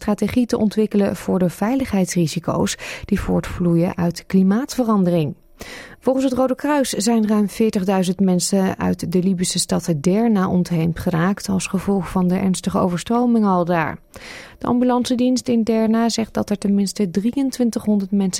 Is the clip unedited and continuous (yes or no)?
no